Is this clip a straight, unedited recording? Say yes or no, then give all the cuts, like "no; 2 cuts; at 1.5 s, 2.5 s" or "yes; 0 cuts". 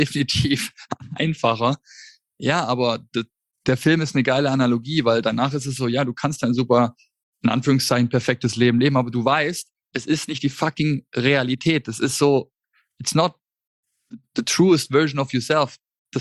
yes; 0 cuts